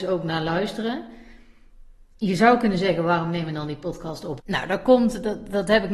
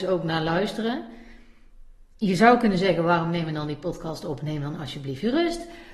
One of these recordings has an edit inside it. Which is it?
first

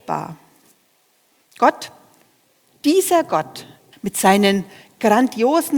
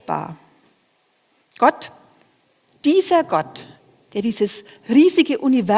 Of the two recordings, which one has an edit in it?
first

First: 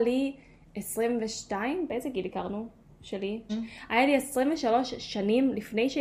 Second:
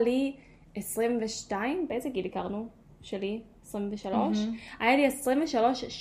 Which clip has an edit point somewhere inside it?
first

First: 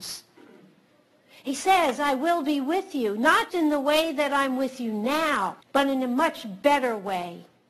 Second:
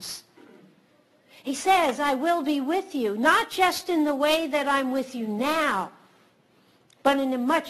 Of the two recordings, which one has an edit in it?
first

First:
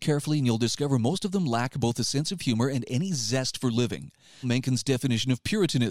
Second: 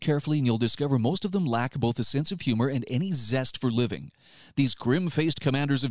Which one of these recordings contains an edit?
first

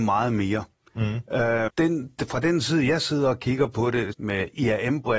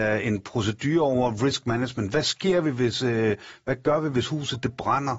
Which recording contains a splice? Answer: first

